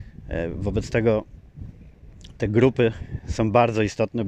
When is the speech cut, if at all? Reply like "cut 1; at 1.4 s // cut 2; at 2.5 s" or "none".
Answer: none